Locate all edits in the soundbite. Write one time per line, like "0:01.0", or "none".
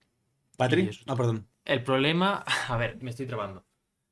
0:01.5
0:03.0